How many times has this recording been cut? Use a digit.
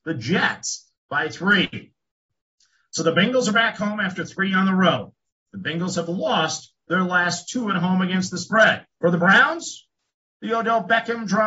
1